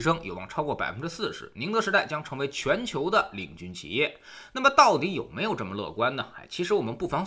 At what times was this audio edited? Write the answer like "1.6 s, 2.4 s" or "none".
none